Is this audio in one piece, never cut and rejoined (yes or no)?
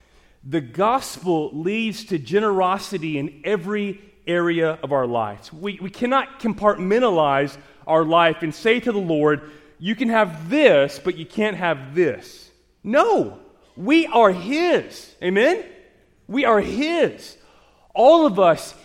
yes